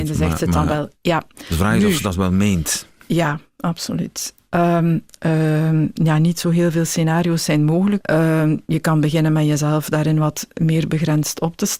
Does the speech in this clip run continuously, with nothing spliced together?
no; 2 cuts; at 5.1 s, 8.0 s

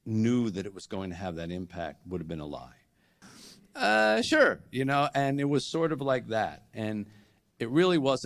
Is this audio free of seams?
no; 1 cut; at 3.2 s

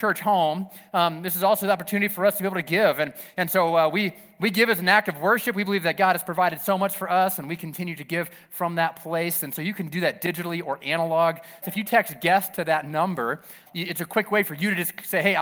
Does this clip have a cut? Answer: yes; 2 cuts; at 11.6 s, 13.7 s

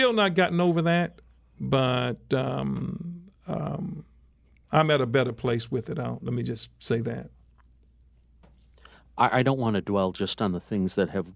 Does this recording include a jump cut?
no; 0 cuts

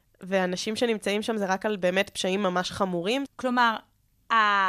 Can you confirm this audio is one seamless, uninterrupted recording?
no; 1 cut; at 3.3 s

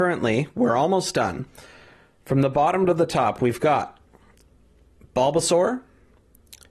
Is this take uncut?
yes; 0 cuts

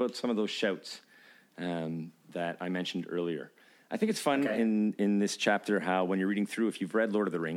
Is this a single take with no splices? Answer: yes; 0 cuts

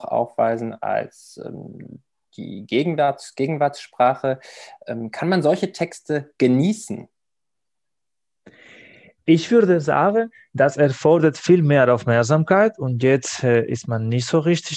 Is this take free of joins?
yes; 0 cuts

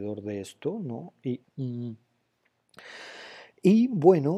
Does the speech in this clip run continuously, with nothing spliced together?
no; 1 cut; at 1.4 s

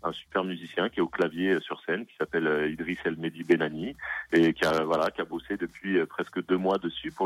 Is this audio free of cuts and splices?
yes; 0 cuts

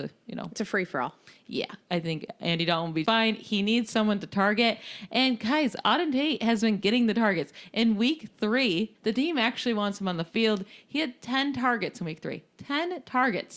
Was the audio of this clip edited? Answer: yes; 2 cuts; at 3.0 s, 8.9 s

